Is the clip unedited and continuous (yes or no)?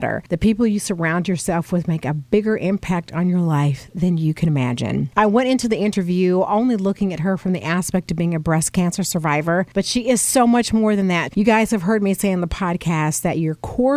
no